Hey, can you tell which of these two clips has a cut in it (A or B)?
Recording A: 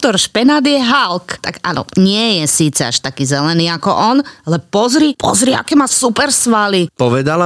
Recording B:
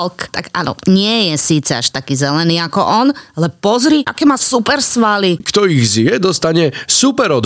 B